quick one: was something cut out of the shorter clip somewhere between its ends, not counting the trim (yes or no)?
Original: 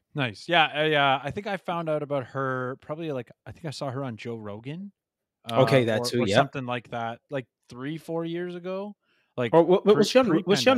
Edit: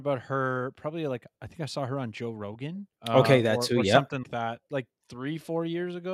yes